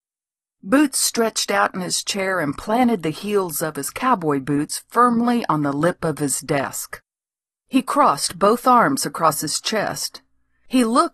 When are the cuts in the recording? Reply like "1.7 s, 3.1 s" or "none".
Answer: none